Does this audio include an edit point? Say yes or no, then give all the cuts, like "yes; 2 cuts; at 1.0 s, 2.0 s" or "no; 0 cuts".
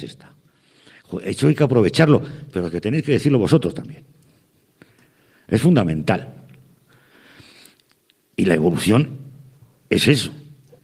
no; 0 cuts